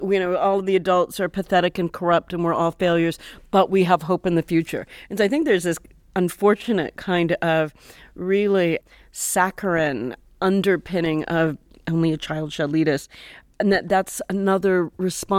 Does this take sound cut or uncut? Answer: uncut